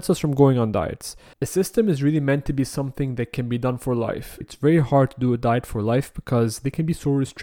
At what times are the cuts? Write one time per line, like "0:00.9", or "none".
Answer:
0:01.3
0:04.4